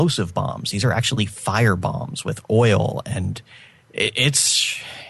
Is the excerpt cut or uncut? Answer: uncut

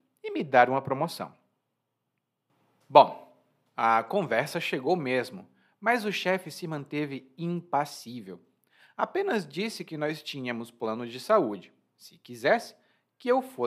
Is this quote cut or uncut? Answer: uncut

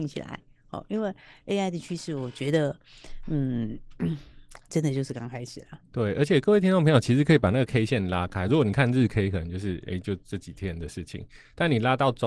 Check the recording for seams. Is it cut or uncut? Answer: uncut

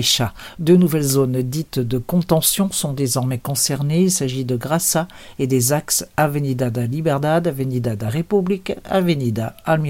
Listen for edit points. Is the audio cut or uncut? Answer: uncut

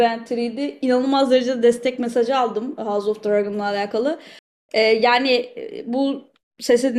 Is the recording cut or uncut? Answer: uncut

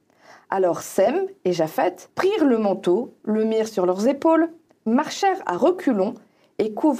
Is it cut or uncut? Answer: cut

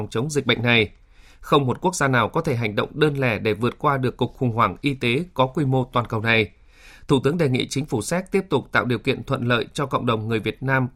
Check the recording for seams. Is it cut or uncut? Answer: uncut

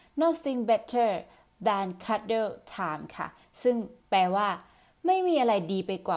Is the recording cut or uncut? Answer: cut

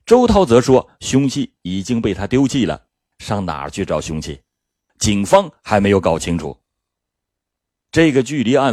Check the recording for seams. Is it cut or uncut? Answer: cut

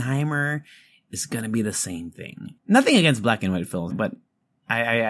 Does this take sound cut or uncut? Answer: cut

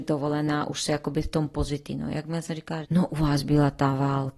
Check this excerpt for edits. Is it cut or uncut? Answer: cut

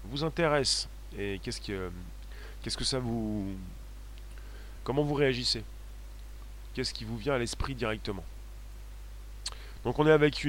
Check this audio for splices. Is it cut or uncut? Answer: uncut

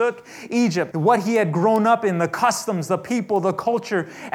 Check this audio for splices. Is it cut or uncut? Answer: cut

